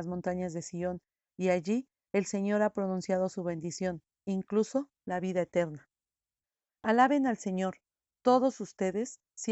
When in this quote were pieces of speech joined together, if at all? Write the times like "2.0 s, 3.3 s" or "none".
6.7 s